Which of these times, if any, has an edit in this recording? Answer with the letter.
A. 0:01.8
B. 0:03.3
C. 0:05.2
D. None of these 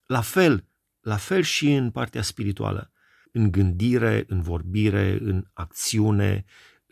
B